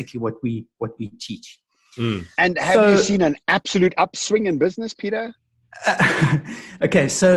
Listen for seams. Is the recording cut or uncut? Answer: uncut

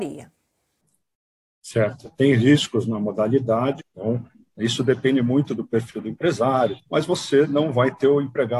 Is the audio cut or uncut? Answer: cut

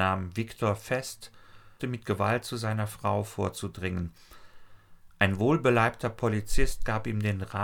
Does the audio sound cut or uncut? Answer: cut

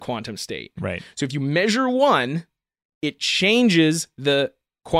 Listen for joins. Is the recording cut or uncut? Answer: uncut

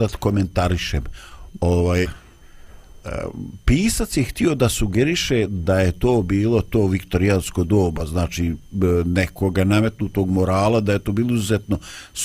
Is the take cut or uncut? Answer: cut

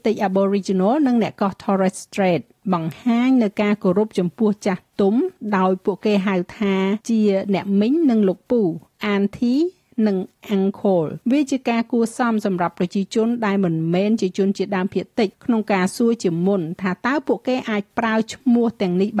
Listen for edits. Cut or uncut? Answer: cut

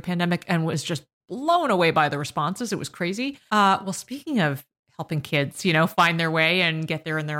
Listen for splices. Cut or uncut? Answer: cut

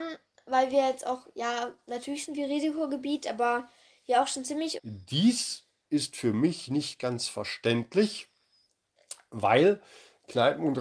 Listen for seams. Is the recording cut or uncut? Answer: cut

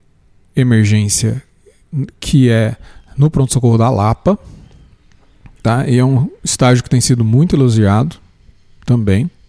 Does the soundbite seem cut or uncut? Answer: uncut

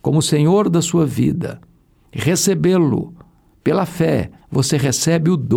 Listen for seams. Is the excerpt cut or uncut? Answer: cut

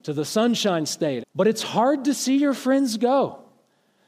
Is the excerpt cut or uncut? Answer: cut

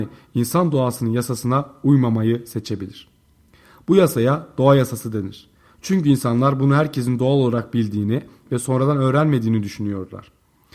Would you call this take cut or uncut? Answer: uncut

